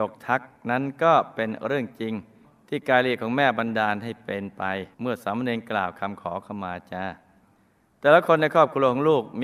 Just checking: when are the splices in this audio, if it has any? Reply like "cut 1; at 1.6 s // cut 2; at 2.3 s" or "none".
cut 1; at 4.9 s